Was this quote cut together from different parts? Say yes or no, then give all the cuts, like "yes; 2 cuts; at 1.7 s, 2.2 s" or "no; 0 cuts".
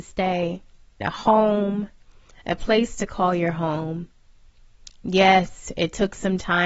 yes; 2 cuts; at 1.0 s, 5.0 s